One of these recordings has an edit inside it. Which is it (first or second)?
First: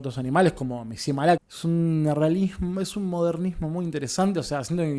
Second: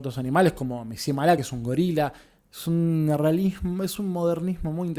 first